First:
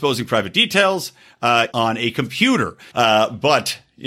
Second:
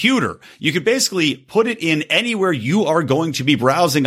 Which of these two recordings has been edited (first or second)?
first